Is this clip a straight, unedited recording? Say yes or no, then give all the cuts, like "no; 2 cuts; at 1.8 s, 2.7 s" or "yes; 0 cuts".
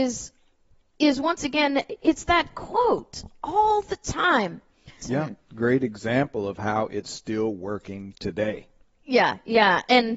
no; 1 cut; at 5.0 s